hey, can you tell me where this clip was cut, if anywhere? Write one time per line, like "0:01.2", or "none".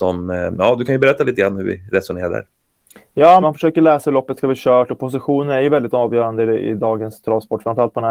0:03.4